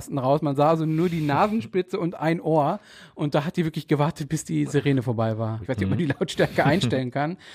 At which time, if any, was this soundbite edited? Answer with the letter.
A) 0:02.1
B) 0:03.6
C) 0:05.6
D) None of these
C